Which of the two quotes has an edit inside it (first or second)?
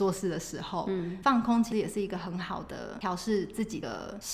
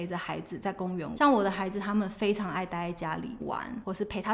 second